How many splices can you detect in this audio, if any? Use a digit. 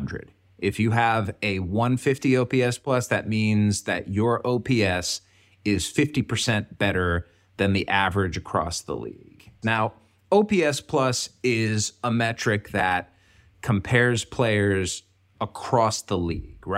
1